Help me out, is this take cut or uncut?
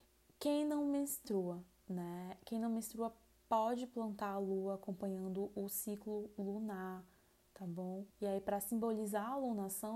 cut